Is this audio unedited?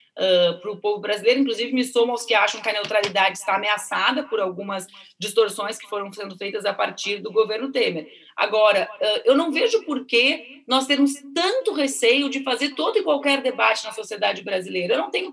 yes; 0 cuts

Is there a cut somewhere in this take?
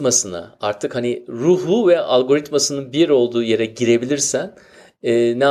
no; 0 cuts

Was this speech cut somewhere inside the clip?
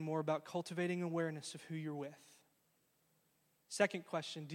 no; 0 cuts

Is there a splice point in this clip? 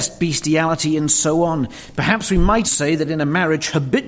yes; 1 cut; at 2.6 s

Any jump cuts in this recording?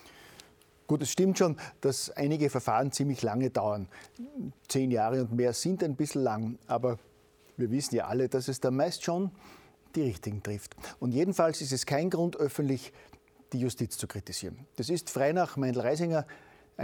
no; 0 cuts

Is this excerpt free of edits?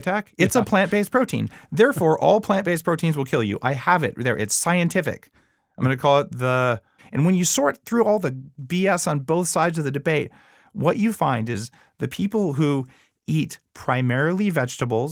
no; 1 cut; at 7.0 s

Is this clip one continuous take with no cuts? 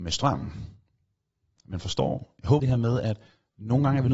no; 2 cuts; at 1.6 s, 2.6 s

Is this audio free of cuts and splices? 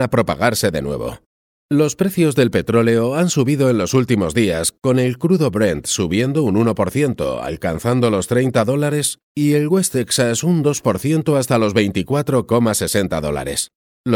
yes; 0 cuts

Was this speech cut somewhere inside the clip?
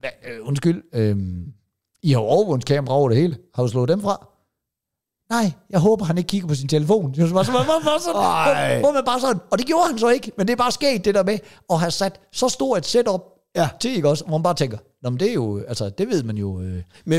no; 0 cuts

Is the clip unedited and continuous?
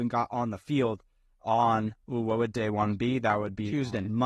yes; 0 cuts

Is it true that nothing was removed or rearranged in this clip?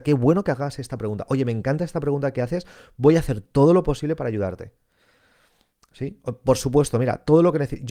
yes; 0 cuts

